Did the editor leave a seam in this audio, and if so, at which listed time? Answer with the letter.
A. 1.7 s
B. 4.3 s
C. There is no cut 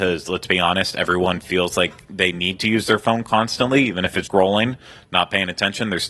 B